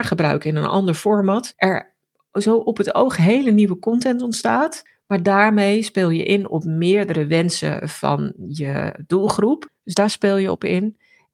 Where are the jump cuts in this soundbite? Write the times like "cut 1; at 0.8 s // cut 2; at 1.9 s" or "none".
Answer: cut 1; at 9.8 s